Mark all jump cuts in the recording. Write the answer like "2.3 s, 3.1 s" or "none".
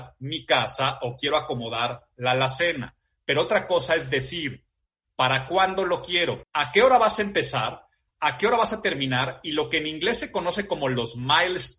6.4 s